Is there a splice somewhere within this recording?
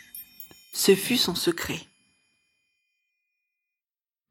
no; 0 cuts

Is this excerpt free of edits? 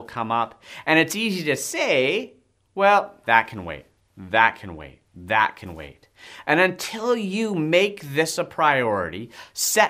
no; 1 cut; at 3.2 s

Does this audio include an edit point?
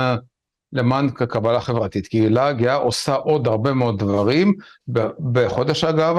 no; 0 cuts

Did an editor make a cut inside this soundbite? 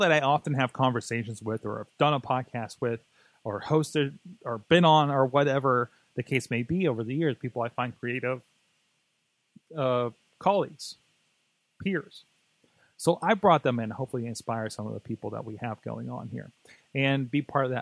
no; 0 cuts

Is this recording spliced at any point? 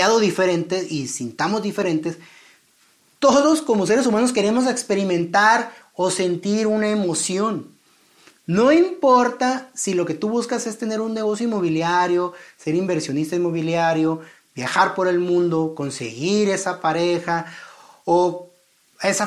no; 0 cuts

